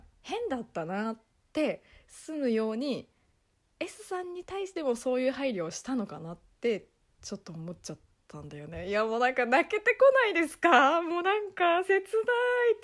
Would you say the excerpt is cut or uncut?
uncut